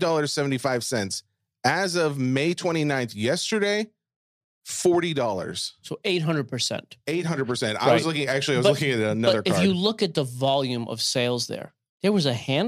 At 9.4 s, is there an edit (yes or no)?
no